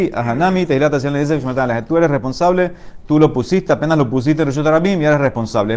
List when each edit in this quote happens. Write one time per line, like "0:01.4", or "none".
none